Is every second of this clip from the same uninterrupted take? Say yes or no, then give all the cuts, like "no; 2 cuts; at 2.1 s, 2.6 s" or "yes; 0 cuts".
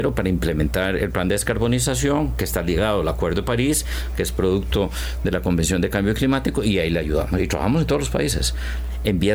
yes; 0 cuts